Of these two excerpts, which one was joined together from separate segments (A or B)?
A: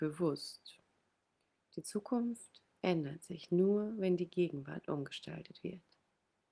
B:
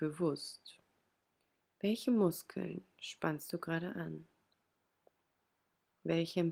A